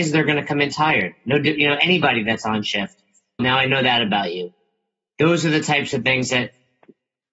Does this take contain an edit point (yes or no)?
yes